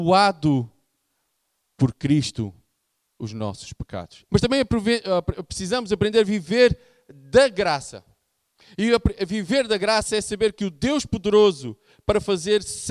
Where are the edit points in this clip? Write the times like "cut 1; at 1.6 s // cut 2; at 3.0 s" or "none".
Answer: cut 1; at 4.3 s

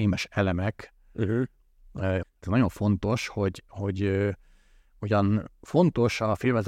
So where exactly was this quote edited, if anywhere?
cut 1; at 2.2 s

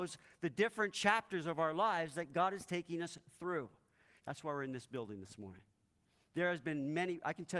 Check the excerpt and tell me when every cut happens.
cut 1; at 4.2 s

